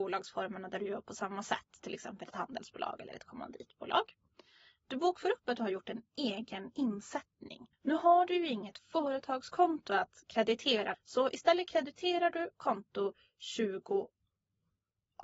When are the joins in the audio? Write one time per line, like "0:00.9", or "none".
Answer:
0:07.7
0:10.9